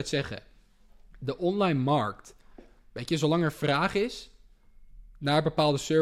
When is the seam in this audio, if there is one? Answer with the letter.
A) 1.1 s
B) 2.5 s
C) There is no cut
A